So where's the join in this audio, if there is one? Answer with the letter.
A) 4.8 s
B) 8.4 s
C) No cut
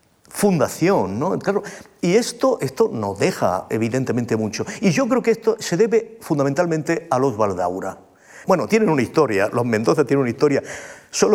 B